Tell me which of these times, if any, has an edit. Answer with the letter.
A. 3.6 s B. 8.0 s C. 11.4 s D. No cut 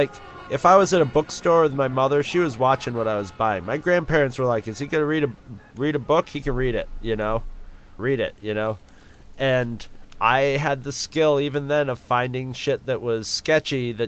B